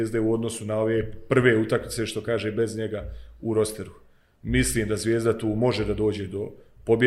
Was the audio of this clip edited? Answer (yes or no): no